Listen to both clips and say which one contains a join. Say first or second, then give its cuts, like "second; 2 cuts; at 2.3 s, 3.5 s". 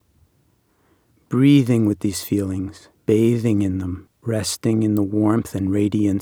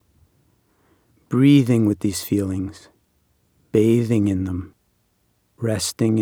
first; 2 cuts; at 3.0 s, 4.1 s